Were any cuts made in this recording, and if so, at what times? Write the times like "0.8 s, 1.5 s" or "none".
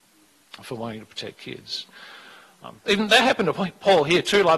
2.9 s